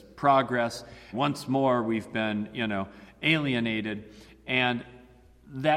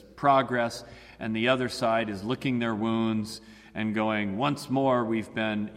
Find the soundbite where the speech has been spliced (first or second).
first